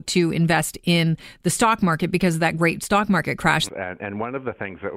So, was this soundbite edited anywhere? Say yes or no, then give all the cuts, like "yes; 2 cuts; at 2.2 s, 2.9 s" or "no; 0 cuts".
yes; 1 cut; at 3.7 s